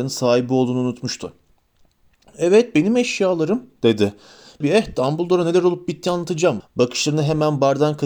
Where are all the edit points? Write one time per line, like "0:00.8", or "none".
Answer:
0:04.6
0:06.6